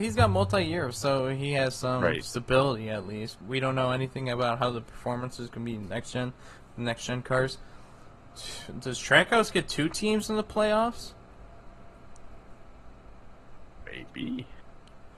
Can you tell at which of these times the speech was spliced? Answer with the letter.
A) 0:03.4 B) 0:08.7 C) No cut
A